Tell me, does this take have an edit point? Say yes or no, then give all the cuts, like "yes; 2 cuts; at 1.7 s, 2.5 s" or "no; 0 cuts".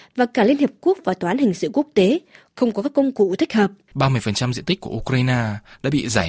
yes; 1 cut; at 3.9 s